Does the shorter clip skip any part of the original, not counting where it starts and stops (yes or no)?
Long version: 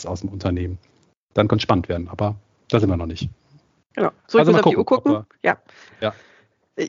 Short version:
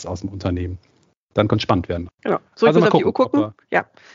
yes